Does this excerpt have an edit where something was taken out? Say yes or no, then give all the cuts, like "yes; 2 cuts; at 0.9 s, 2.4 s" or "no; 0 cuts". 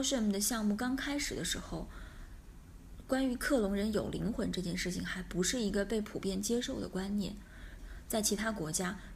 yes; 1 cut; at 7.8 s